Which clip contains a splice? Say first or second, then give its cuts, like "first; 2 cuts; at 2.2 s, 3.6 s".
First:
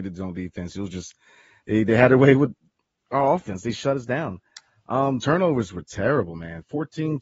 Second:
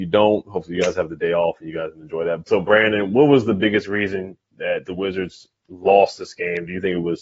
second; 1 cut; at 2.5 s